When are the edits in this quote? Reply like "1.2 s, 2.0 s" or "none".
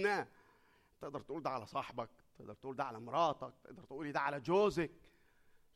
none